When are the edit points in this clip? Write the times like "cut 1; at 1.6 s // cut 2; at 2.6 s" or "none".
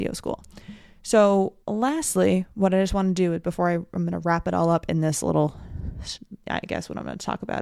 cut 1; at 1.6 s